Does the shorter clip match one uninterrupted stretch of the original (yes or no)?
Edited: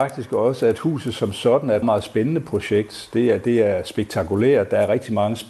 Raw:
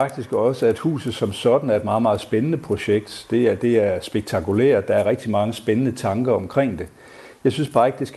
no